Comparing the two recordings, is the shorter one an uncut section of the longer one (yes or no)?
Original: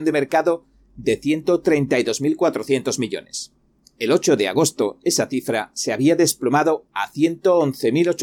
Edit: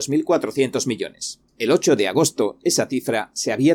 no